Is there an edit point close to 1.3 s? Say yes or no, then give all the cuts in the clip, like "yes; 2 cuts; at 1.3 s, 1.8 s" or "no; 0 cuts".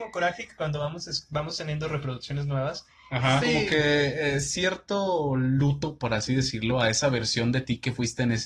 no; 1 cut; at 3.4 s